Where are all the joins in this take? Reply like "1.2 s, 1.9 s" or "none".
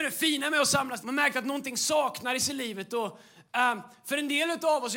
1.0 s